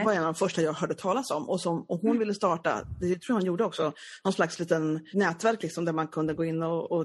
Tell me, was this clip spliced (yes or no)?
yes